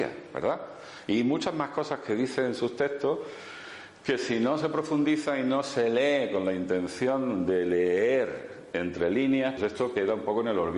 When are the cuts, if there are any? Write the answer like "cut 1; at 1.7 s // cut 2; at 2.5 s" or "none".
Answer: cut 1; at 9.6 s